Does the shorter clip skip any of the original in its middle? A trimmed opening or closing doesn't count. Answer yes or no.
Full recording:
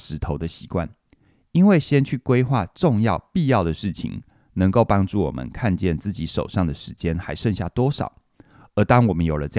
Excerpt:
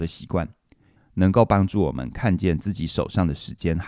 yes